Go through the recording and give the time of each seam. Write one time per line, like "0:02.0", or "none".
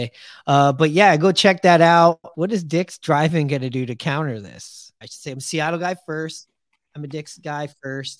0:02.3
0:05.0